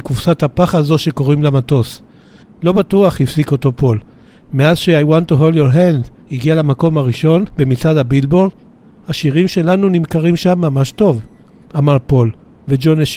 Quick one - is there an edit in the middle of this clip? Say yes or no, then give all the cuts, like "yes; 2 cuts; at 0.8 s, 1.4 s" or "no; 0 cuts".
yes; 2 cuts; at 2.4 s, 11.7 s